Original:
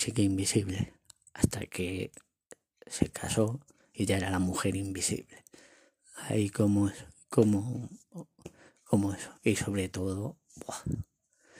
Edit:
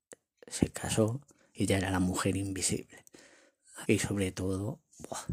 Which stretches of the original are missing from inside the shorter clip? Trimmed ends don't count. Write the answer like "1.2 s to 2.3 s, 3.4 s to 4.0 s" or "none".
6.2 s to 9.4 s